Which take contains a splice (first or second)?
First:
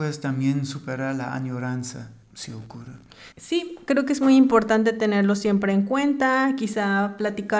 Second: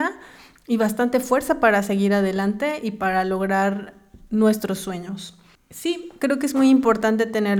first